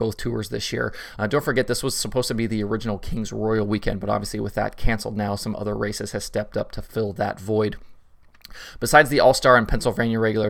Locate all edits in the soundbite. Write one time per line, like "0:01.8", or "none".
0:01.2